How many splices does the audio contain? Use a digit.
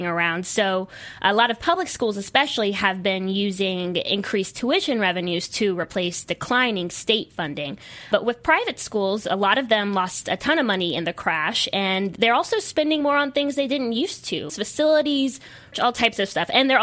2